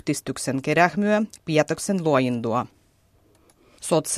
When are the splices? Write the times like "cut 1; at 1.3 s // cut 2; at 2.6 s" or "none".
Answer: cut 1; at 1.4 s